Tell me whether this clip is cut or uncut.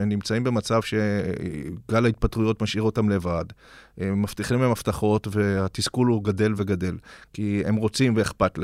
cut